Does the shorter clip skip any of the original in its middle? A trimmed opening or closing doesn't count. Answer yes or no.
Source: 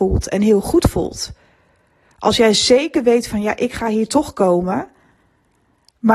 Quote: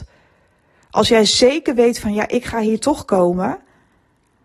no